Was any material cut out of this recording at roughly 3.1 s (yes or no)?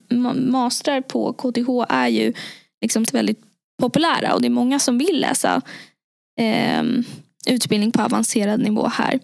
yes